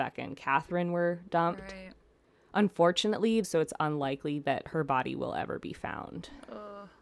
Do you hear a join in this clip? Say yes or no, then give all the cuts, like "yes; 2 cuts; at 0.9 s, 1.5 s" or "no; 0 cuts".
yes; 1 cut; at 3.4 s